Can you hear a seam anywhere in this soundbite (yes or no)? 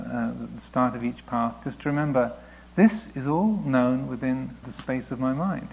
yes